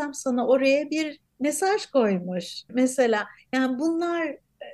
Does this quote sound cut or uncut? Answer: cut